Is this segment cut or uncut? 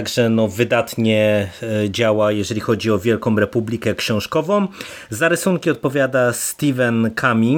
uncut